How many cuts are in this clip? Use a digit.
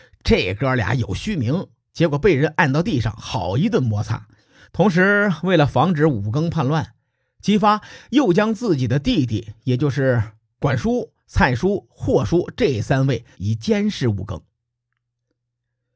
2